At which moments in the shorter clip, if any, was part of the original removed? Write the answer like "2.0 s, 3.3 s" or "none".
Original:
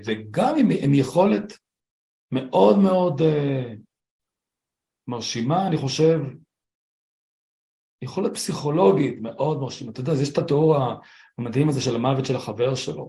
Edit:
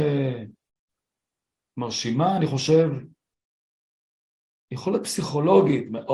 none